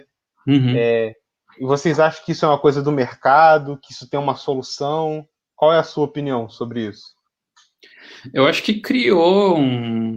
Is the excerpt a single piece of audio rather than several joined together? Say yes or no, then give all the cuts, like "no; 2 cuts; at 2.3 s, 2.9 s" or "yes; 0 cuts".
yes; 0 cuts